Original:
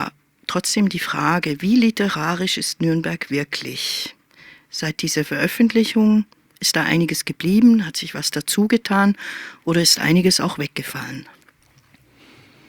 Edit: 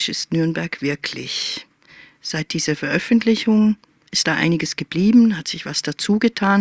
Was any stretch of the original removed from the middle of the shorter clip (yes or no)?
no